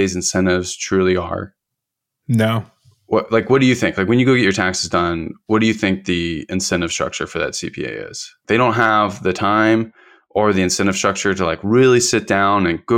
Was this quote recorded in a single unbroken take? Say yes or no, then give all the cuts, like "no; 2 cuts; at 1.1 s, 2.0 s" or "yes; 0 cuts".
no; 1 cut; at 8.4 s